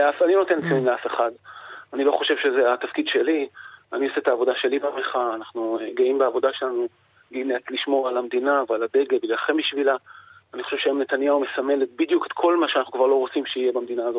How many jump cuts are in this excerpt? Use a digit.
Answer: 0